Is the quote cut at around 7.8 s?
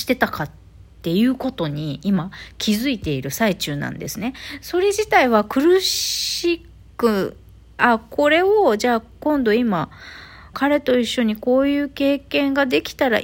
yes; 2 cuts; at 7.8 s, 10.5 s

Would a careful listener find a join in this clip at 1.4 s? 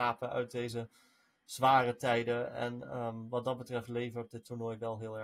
no; 0 cuts

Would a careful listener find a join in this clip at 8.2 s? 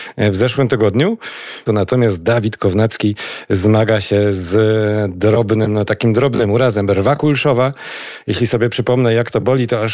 no; 1 cut; at 1.7 s

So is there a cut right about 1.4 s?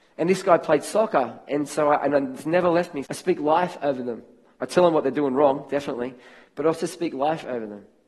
no; 1 cut; at 3.0 s

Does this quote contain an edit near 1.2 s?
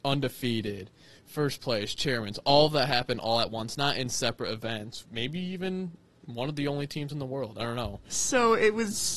no; 2 cuts; at 5.0 s, 8.0 s

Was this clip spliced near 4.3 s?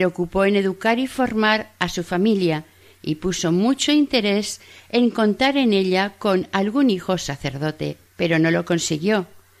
no; 1 cut; at 8.1 s

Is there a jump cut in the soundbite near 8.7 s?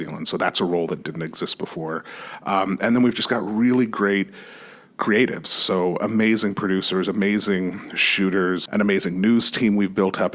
yes; 1 cut; at 8.7 s

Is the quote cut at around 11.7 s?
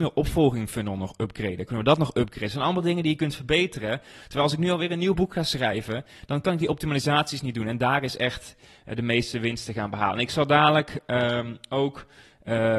no; 1 cut; at 1.7 s

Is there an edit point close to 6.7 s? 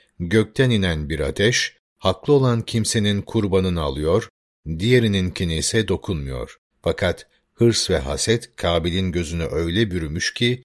yes; 1 cut; at 6.7 s

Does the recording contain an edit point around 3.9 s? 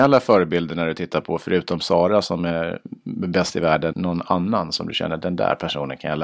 yes; 1 cut; at 3.9 s

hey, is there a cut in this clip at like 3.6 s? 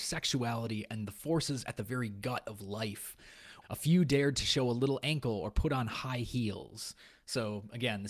yes; 1 cut; at 3.6 s

